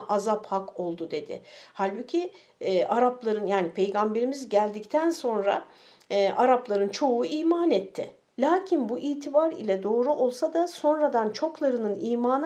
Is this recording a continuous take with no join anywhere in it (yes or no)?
no